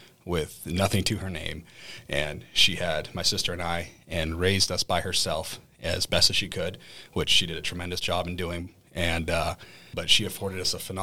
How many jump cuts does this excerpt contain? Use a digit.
1